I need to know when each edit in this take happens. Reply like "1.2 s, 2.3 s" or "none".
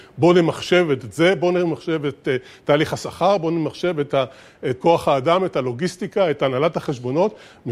4.8 s